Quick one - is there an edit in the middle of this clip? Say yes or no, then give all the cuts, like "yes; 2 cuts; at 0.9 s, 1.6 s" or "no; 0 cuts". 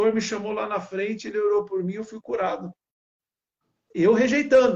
no; 0 cuts